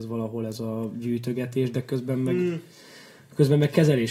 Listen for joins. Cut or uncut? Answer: uncut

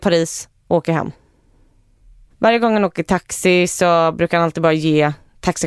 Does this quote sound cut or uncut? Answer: cut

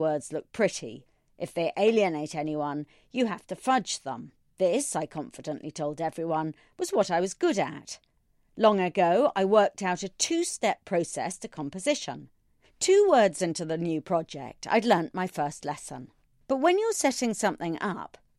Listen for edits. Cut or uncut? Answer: cut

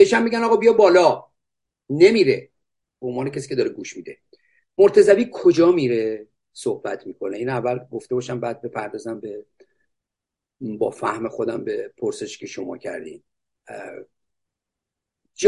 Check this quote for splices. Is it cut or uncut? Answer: uncut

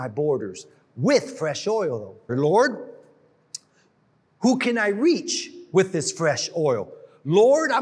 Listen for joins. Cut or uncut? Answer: cut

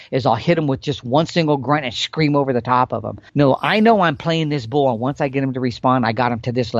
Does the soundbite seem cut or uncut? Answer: cut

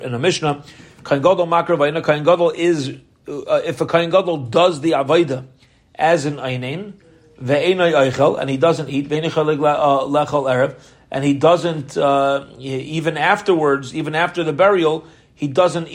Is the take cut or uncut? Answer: uncut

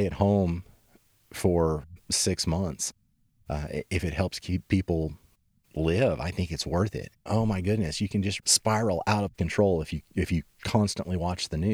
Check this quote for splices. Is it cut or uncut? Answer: cut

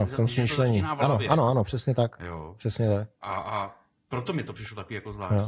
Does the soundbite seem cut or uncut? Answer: uncut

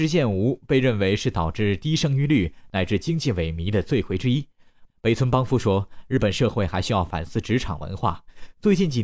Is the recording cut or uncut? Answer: cut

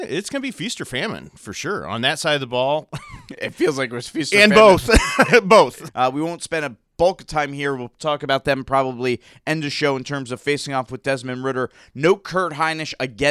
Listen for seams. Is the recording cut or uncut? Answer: cut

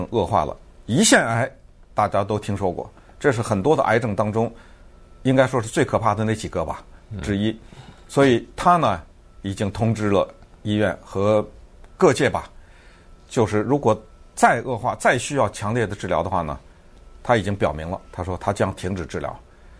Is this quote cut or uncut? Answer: uncut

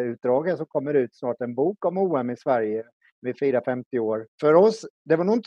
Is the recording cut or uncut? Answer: cut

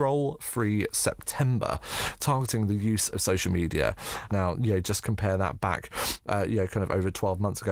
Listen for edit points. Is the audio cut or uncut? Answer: cut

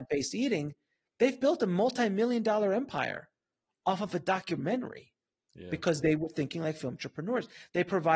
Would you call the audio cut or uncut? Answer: uncut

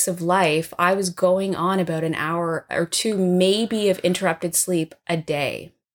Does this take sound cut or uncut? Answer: uncut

